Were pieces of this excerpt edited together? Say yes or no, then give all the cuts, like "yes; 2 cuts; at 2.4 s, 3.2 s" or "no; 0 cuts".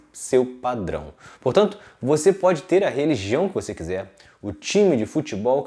no; 0 cuts